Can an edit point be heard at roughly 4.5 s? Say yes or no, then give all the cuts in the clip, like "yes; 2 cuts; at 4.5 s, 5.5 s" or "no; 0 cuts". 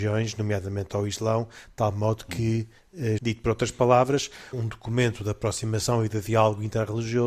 yes; 2 cuts; at 3.2 s, 4.5 s